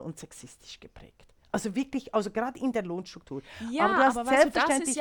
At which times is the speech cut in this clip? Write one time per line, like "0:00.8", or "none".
none

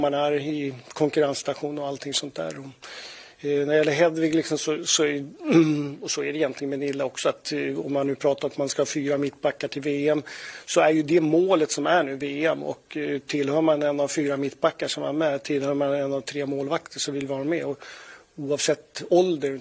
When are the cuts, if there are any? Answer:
none

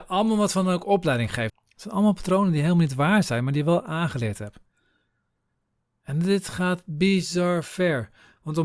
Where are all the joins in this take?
0:01.5

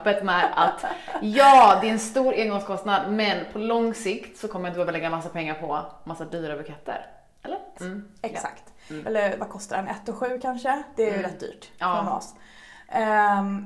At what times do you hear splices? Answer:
0:07.7
0:09.0

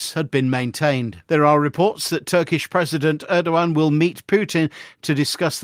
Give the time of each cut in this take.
0:01.2

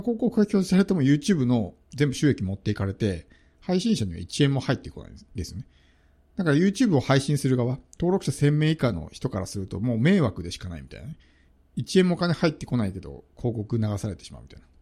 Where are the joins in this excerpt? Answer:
none

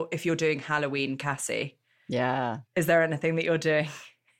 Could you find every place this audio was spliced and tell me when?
none

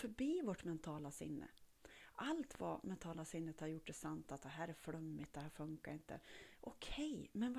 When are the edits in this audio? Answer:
none

